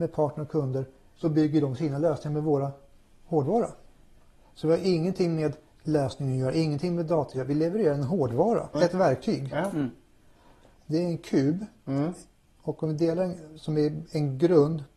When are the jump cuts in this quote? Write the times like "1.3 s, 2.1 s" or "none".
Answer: 8.7 s, 10.7 s